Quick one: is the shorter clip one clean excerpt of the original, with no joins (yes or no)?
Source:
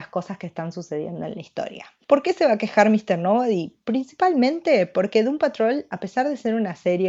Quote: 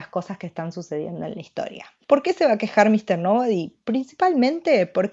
yes